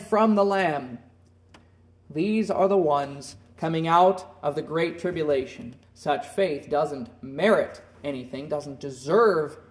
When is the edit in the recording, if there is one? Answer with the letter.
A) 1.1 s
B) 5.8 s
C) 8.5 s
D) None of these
B